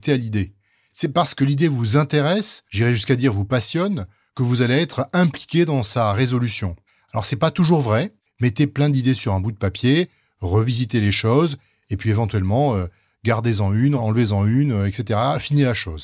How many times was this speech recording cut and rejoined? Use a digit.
1